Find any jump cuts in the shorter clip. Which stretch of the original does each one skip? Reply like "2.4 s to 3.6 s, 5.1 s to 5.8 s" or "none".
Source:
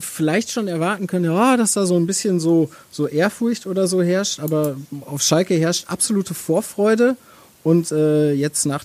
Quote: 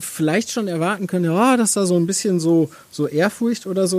none